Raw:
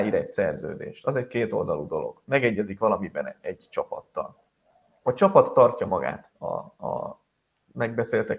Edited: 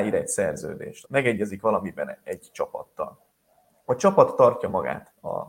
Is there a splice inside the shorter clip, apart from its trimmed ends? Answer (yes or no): yes